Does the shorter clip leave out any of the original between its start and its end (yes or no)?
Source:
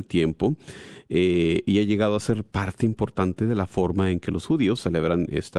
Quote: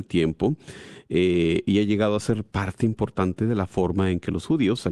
no